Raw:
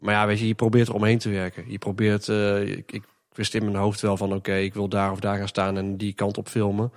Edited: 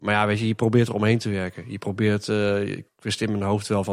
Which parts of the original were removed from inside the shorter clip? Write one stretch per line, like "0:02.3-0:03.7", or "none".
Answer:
0:02.9-0:03.2